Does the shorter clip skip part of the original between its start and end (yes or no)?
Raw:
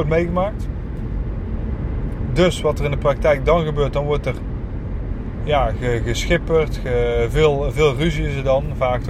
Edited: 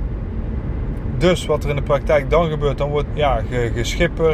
yes